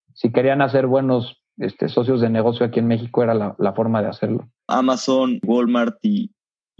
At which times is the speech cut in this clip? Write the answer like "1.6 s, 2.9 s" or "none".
4.7 s